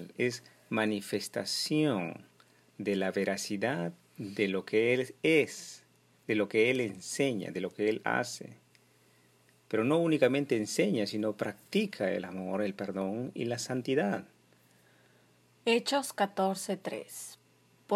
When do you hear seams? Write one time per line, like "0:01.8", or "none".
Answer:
none